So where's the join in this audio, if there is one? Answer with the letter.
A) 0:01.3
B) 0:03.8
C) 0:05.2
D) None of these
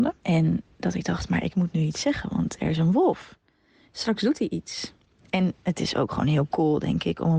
D